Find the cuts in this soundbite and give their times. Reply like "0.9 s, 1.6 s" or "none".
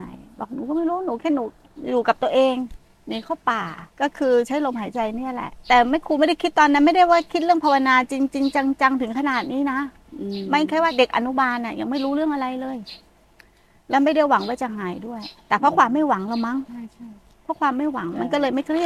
3.9 s